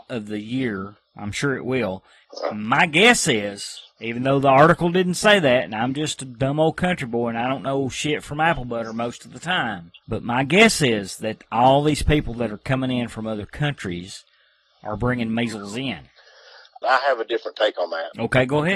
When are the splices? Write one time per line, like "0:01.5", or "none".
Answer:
0:16.8